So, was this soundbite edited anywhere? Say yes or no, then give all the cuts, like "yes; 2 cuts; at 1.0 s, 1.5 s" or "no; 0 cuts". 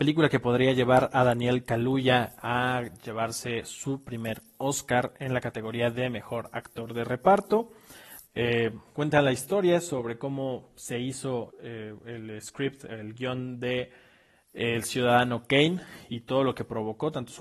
yes; 2 cuts; at 8.2 s, 11.5 s